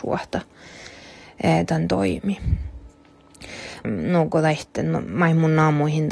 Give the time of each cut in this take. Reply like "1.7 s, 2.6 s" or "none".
3.8 s